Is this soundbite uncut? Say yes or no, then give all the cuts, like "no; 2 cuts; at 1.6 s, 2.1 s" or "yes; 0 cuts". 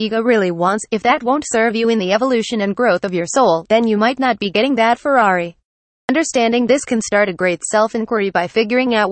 yes; 0 cuts